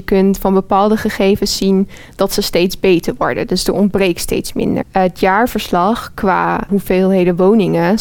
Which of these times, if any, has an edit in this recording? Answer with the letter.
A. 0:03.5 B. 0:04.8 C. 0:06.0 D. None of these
B